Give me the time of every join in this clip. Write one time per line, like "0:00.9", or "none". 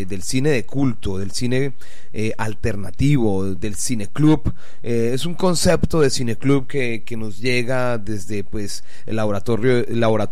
0:03.6